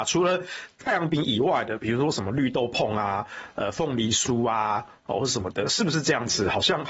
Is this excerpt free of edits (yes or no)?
yes